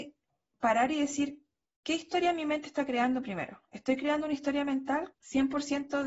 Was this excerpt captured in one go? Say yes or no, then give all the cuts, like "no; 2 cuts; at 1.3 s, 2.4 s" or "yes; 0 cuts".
no; 1 cut; at 5.1 s